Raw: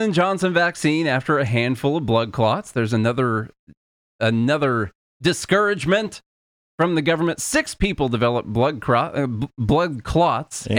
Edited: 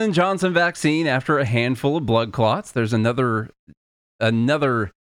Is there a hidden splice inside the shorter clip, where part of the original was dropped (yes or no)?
no